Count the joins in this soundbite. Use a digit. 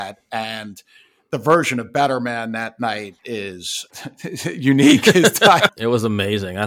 2